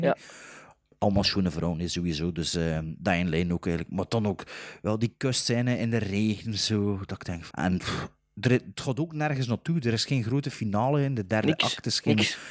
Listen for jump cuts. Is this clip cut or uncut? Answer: cut